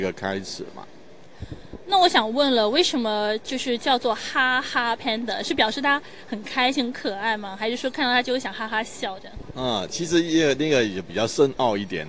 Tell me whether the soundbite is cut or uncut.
uncut